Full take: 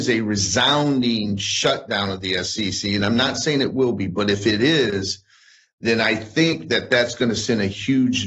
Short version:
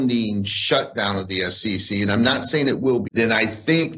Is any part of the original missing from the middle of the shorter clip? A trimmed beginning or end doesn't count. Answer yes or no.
yes